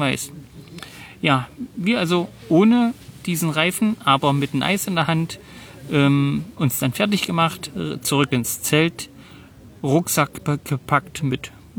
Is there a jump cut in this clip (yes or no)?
no